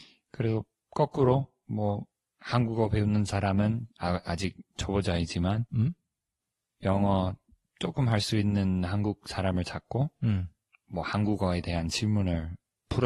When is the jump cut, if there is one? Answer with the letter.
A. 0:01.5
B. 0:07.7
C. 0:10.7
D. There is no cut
C